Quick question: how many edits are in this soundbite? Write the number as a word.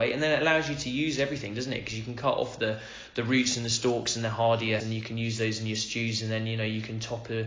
one